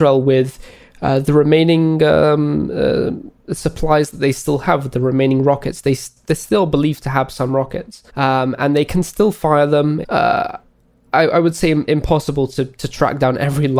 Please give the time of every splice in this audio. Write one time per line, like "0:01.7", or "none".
0:08.1
0:10.0